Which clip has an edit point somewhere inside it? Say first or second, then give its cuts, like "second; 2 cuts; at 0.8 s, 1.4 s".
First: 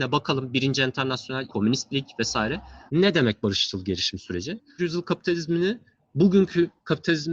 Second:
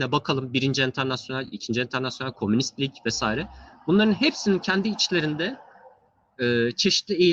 first; 3 cuts; at 1.5 s, 2.9 s, 4.8 s